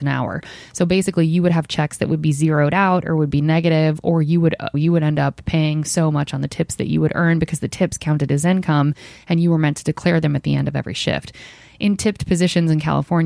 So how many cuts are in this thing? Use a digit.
1